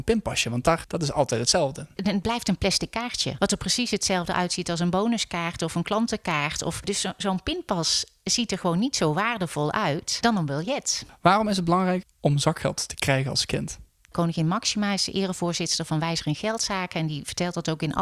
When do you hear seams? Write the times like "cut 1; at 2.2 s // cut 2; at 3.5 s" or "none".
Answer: cut 1; at 12.0 s